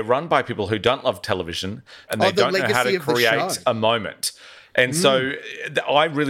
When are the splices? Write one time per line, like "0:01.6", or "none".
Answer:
0:02.1